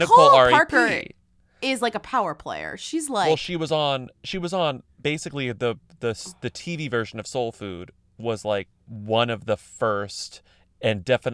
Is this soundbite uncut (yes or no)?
no